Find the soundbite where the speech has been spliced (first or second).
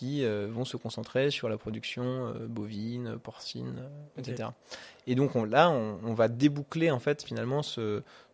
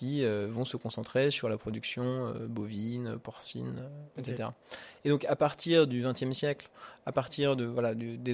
second